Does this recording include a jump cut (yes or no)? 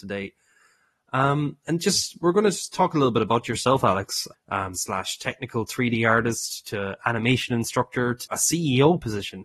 yes